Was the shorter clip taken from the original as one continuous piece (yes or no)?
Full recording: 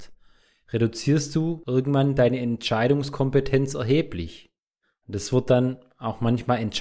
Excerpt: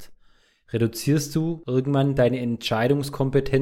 yes